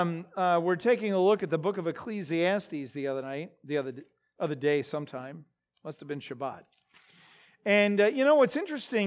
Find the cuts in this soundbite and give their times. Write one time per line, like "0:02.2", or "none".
none